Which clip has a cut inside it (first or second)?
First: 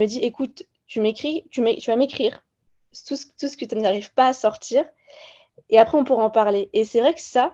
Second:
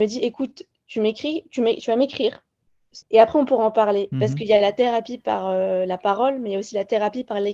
second